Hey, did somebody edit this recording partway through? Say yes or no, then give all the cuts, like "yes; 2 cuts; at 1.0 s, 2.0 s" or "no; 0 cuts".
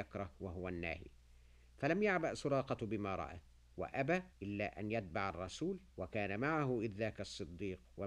yes; 2 cuts; at 4.3 s, 5.9 s